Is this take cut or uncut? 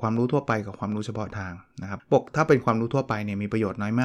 cut